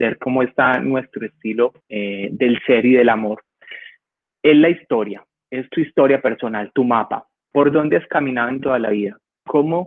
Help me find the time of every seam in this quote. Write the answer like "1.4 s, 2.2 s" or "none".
1.8 s